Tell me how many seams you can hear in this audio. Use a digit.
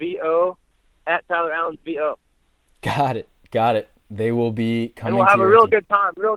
0